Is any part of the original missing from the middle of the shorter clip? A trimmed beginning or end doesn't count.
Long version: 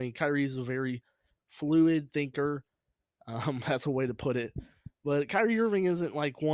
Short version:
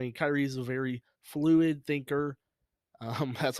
yes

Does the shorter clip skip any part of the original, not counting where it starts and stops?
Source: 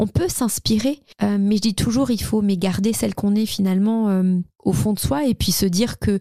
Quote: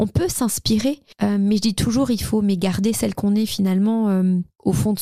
no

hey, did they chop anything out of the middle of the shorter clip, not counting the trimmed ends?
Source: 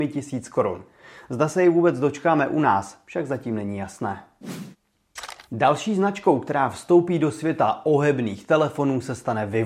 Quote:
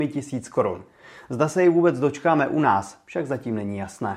no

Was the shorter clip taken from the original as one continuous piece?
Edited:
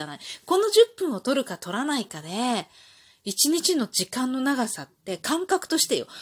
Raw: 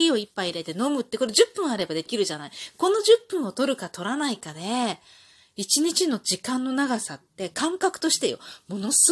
yes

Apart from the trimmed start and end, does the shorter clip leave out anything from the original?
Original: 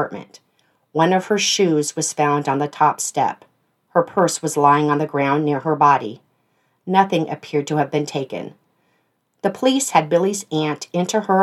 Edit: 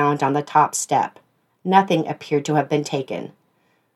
yes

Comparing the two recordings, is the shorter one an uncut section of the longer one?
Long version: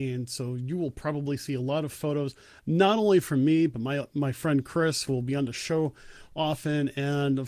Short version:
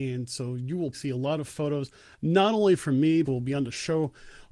no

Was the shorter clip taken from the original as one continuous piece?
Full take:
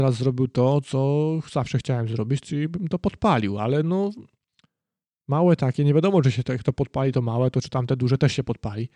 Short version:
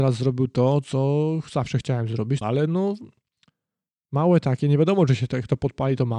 no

